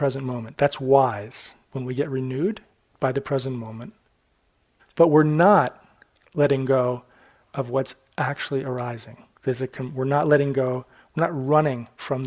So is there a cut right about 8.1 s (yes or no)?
no